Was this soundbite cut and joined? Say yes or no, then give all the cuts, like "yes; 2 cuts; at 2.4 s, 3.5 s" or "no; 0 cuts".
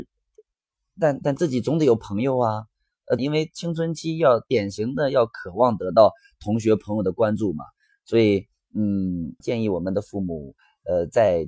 yes; 2 cuts; at 3.2 s, 9.4 s